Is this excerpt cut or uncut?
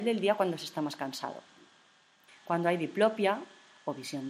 cut